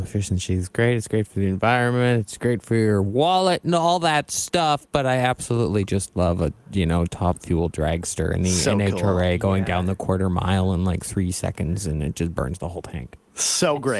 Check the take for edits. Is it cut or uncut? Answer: uncut